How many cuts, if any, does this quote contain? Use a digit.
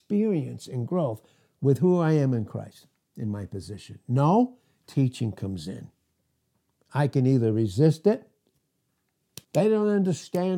1